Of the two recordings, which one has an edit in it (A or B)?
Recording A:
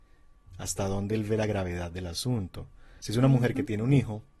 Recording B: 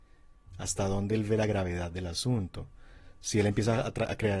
A